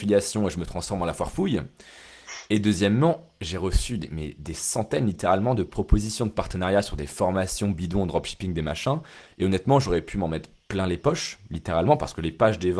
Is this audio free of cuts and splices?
yes; 0 cuts

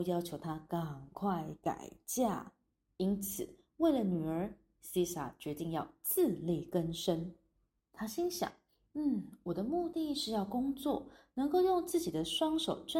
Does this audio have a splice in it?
yes; 2 cuts; at 2.9 s, 7.8 s

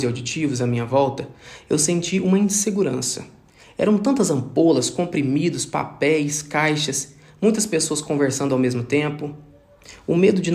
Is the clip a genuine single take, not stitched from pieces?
yes; 0 cuts

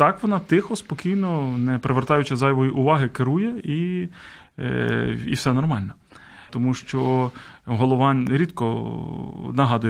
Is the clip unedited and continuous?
no; 1 cut; at 6.5 s

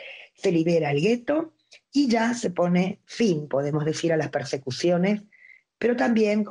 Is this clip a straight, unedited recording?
yes; 0 cuts

